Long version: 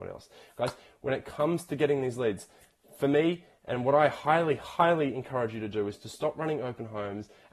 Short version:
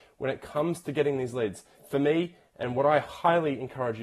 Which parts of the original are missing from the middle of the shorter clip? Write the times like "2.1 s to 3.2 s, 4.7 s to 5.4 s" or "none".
2.6 s to 2.8 s, 4.1 s to 4.6 s